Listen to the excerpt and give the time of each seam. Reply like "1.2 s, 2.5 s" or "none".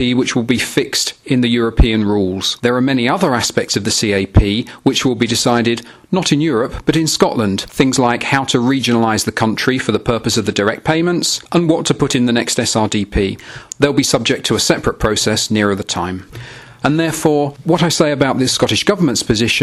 13.7 s, 16.8 s